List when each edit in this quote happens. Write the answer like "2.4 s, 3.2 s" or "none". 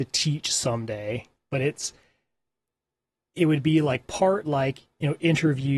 1.4 s